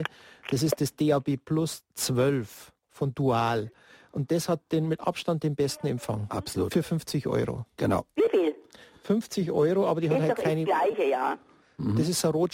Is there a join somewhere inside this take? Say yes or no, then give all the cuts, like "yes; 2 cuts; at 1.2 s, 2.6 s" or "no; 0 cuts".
no; 0 cuts